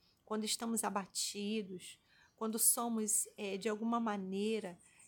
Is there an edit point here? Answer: no; 0 cuts

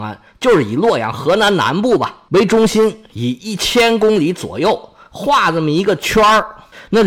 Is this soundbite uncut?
yes; 0 cuts

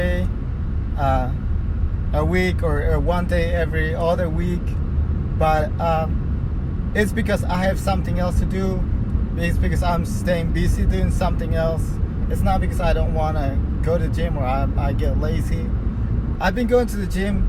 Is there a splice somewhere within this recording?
yes; 1 cut; at 16.4 s

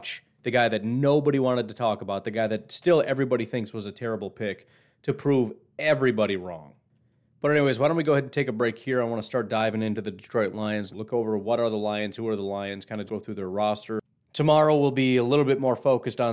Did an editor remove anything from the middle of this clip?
yes; 2 cuts; at 10.9 s, 13.1 s

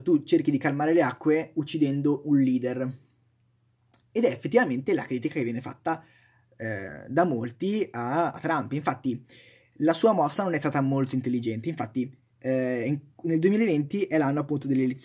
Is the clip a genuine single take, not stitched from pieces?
yes; 0 cuts

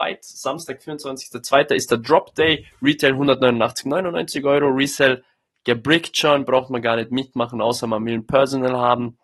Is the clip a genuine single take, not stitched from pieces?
yes; 0 cuts

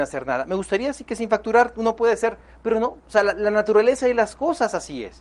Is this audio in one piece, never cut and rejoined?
yes; 0 cuts

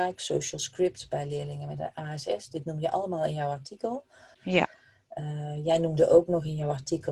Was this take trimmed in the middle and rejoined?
yes; 1 cut; at 4.3 s

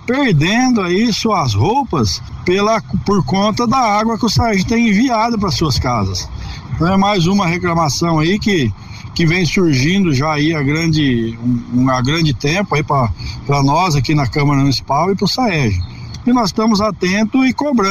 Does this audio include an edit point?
yes; 2 cuts; at 6.7 s, 16.2 s

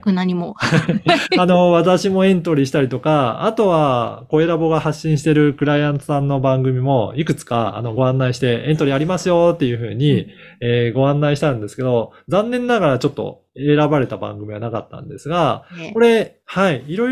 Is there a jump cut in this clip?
no; 0 cuts

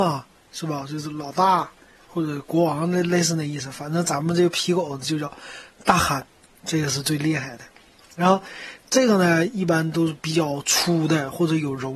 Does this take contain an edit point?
no; 0 cuts

